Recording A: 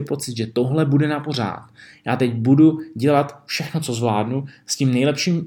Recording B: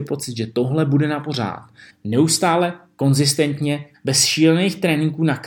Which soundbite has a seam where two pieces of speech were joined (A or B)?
B